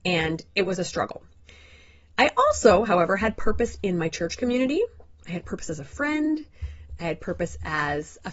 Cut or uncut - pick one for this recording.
uncut